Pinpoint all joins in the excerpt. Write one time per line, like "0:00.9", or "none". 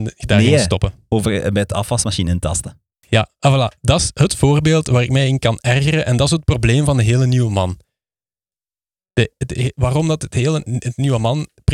none